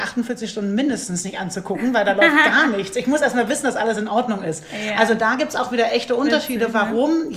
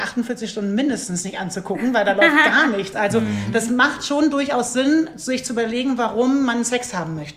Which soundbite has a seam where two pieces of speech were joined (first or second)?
second